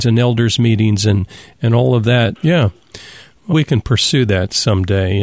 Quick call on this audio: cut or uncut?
cut